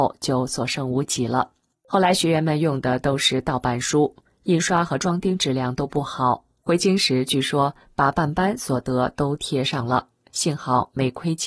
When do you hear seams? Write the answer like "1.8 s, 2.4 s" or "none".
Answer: 1.7 s, 6.6 s